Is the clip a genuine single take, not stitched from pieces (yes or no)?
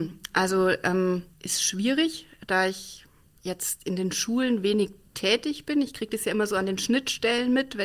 no